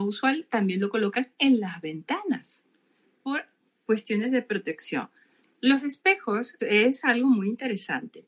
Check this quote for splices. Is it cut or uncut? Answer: cut